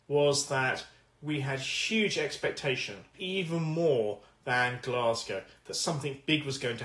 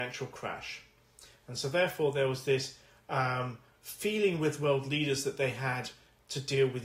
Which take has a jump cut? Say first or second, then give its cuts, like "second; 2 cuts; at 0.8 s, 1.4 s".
first; 1 cut; at 3.1 s